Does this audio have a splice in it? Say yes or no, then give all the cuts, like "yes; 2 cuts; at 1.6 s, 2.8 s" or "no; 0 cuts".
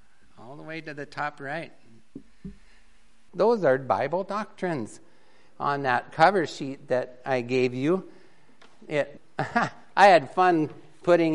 yes; 2 cuts; at 3.3 s, 9.2 s